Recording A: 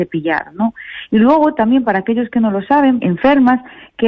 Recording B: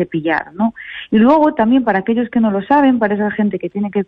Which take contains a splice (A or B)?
A